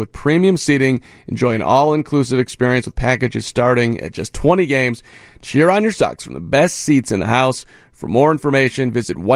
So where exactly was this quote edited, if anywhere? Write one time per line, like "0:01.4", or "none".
none